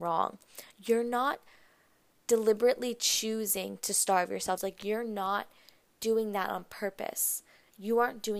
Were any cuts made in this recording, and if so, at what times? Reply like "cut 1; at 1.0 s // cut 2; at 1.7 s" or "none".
cut 1; at 4.6 s